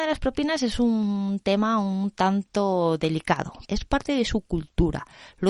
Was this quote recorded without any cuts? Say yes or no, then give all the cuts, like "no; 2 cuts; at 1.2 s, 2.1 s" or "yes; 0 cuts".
no; 1 cut; at 3.6 s